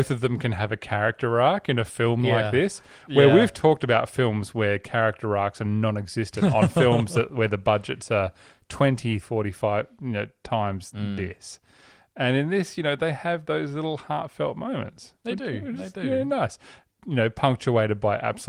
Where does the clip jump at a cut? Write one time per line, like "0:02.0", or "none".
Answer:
0:09.2